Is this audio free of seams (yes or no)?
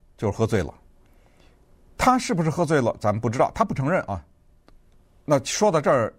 yes